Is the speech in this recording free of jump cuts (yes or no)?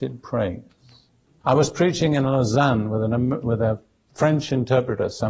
no